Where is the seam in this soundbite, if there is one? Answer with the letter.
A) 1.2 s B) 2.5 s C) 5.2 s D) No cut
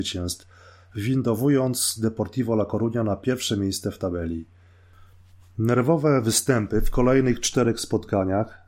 D